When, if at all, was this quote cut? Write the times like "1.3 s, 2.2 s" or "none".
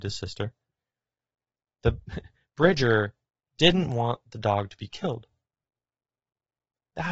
none

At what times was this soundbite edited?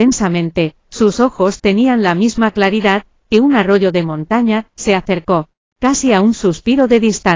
4.7 s

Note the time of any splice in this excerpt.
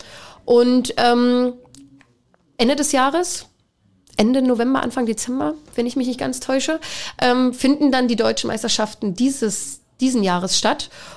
none

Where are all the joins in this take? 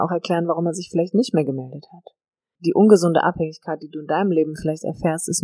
2.6 s

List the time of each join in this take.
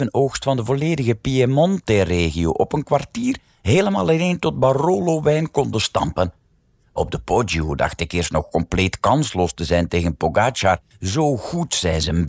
10.9 s

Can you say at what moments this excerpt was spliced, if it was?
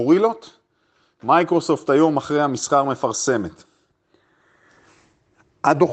none

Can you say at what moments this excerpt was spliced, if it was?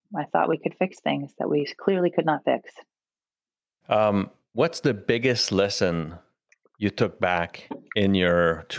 3.8 s

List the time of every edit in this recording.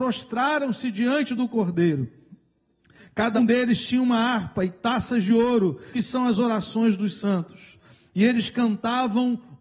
3.4 s, 5.9 s

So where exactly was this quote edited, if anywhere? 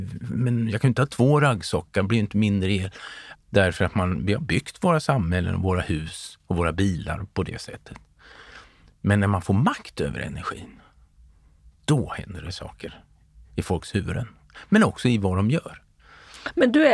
3.4 s

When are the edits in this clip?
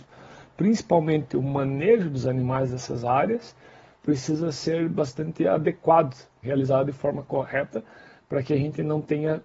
6.4 s

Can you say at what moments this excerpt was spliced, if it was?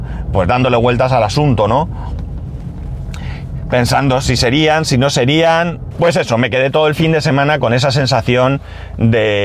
5.9 s

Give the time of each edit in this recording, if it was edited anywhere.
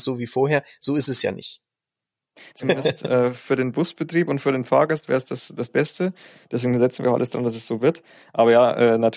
2.5 s

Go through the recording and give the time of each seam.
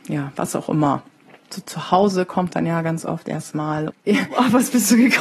1.5 s, 3.9 s

